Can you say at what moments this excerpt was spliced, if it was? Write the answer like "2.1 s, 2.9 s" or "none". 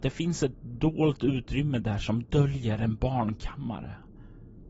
none